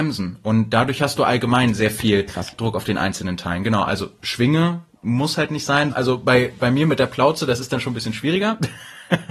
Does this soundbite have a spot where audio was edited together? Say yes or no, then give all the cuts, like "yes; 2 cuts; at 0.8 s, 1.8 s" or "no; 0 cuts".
yes; 1 cut; at 5.9 s